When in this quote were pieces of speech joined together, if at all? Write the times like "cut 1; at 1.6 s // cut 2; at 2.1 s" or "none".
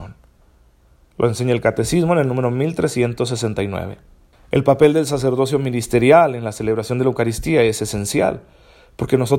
cut 1; at 4.3 s